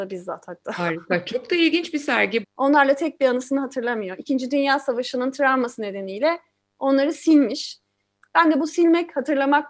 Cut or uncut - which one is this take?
cut